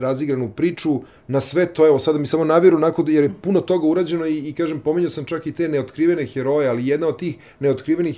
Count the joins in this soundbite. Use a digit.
0